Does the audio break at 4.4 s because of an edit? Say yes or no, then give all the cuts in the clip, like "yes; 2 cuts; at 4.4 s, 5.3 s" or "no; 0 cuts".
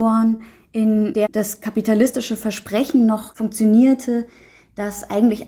no; 0 cuts